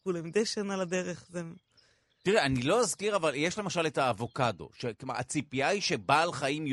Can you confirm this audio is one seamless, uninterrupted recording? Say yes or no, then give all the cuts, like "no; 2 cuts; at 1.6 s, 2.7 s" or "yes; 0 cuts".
yes; 0 cuts